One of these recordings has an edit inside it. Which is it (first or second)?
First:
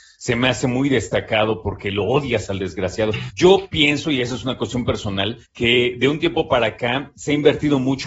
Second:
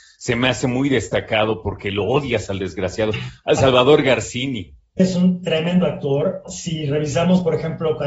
first